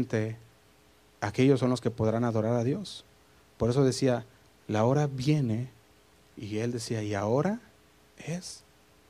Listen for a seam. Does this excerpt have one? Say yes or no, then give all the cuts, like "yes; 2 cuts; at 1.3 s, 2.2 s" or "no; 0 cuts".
no; 0 cuts